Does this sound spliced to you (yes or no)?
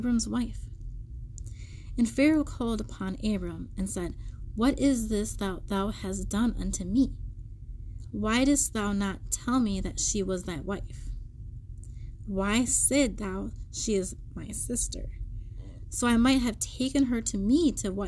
no